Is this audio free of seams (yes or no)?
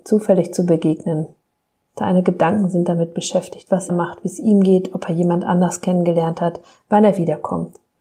no